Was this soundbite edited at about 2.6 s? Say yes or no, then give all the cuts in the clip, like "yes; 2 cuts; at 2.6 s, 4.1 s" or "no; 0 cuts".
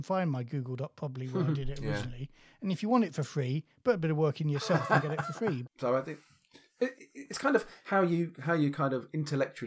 no; 2 cuts; at 5.6 s, 6.9 s